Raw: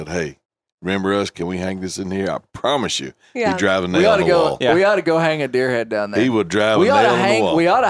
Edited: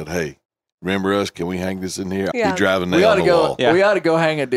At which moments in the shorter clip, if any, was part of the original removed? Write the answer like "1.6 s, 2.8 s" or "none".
2.3 s